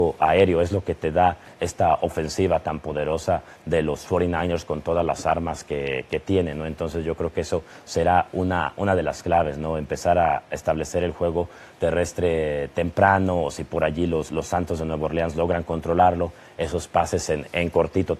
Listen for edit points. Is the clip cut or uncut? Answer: uncut